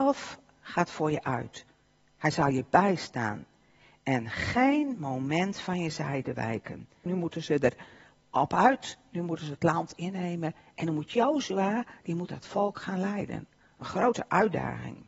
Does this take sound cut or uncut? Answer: cut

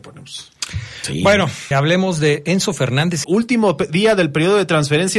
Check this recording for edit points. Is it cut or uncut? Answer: cut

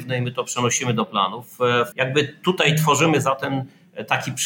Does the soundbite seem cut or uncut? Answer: cut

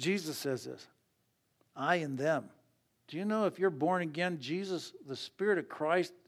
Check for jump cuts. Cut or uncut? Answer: uncut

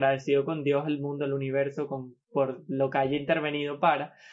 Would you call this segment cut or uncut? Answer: uncut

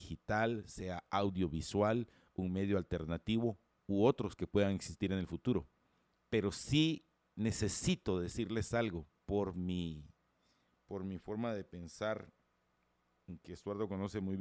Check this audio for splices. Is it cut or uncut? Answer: cut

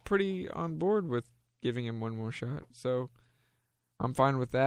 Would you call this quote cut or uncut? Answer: cut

